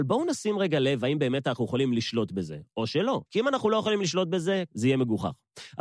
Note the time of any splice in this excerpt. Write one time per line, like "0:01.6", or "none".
0:03.3
0:04.7